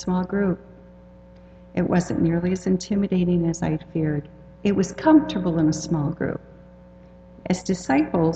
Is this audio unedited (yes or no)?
no